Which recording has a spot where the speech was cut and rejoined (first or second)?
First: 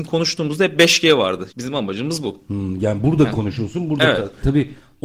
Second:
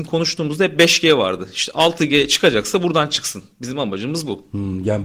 first